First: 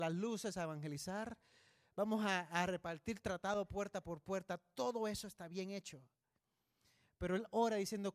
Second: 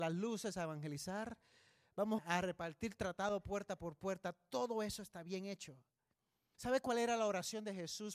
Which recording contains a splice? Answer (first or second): second